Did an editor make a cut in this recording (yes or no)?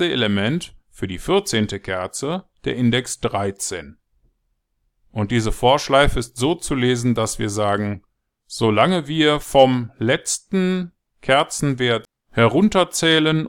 no